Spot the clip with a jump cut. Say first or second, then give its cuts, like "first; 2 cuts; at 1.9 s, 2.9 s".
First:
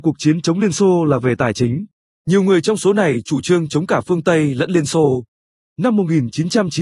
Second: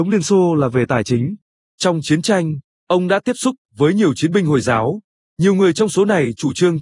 first; 2 cuts; at 2.2 s, 5.6 s